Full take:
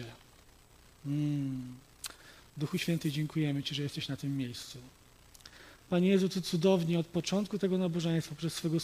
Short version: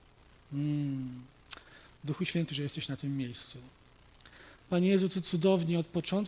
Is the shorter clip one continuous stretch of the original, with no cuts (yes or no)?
no